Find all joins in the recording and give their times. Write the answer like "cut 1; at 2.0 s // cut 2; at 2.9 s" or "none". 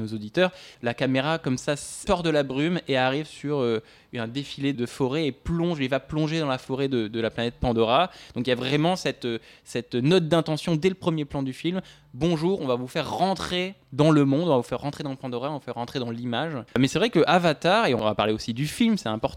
cut 1; at 4.7 s // cut 2; at 16.7 s